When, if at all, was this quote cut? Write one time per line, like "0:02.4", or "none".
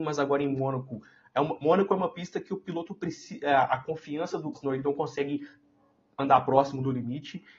0:04.5